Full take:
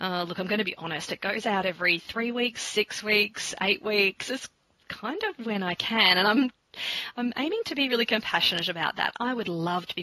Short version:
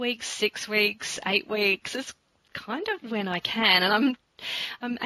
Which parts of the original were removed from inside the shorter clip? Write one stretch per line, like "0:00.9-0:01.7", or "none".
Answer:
none